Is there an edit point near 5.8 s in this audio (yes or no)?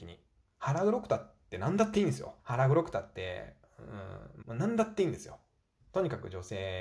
no